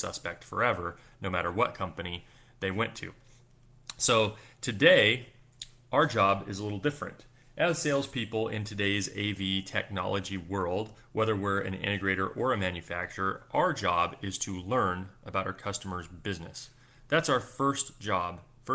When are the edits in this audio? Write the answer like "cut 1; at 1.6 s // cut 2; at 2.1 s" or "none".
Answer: none